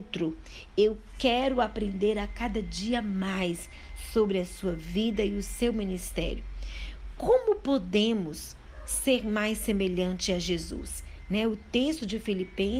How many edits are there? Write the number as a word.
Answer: zero